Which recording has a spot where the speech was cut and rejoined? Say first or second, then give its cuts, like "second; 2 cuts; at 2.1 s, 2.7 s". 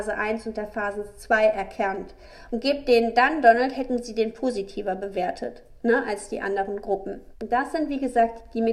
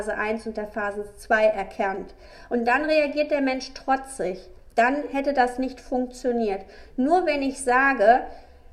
first; 2 cuts; at 2.5 s, 7.3 s